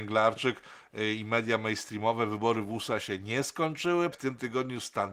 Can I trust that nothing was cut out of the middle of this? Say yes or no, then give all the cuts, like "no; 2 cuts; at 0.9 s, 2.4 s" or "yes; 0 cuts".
no; 1 cut; at 4.1 s